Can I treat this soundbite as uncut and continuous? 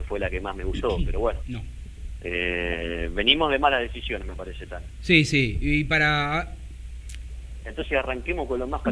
no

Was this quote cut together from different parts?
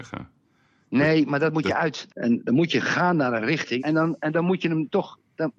yes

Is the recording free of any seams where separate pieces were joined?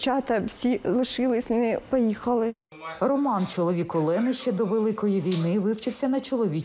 yes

